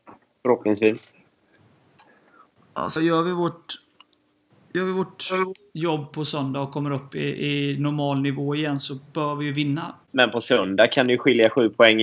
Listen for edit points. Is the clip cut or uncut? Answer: cut